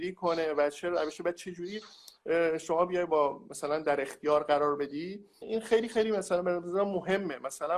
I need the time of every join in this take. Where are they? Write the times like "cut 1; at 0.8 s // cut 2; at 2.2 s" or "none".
cut 1; at 5.4 s